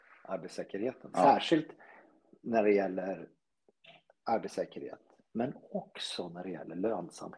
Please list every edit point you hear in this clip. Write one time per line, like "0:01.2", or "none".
0:01.1